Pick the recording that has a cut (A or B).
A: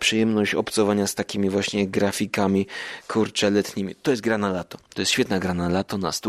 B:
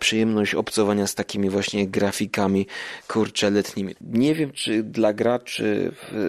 B